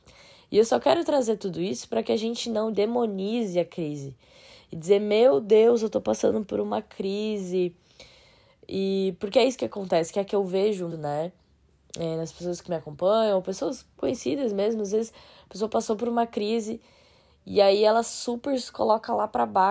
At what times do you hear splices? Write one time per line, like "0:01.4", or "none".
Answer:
0:02.7
0:10.9